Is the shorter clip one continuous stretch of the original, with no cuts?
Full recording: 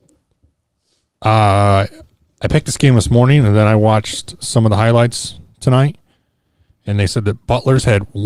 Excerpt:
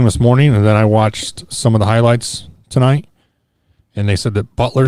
yes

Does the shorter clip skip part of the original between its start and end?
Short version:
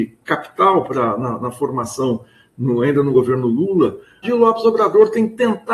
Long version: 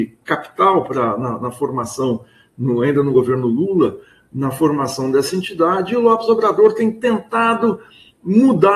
yes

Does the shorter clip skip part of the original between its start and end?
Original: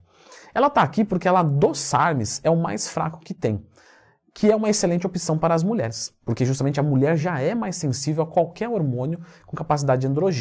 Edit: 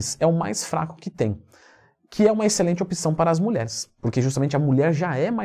no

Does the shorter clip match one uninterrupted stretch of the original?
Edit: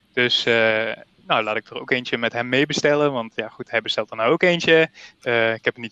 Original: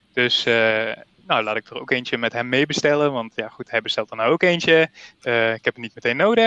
yes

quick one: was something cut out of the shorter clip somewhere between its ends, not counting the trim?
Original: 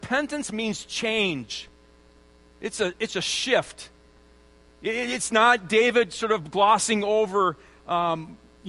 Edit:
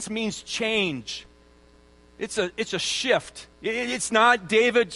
yes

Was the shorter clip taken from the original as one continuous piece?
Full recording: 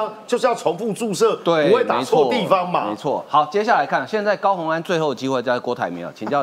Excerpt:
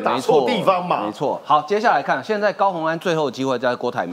yes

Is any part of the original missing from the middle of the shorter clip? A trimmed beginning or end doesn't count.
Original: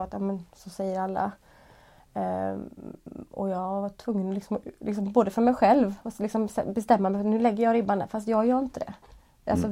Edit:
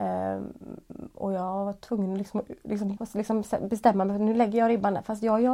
yes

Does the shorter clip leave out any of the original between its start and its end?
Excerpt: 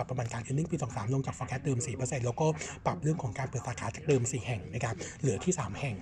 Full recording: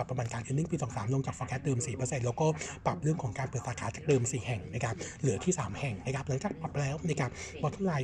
no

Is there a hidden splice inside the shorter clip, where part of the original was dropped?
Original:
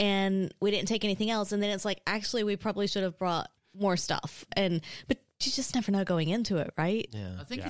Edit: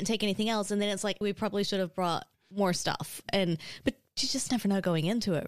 yes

